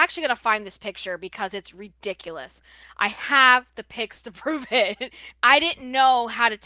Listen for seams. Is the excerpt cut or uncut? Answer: cut